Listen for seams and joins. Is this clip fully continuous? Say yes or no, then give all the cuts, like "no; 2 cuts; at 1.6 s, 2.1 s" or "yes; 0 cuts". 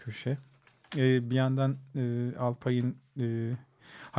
yes; 0 cuts